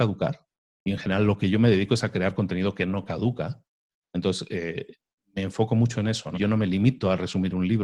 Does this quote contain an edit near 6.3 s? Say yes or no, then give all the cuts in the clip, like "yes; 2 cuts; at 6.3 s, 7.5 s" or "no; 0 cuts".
yes; 1 cut; at 6.3 s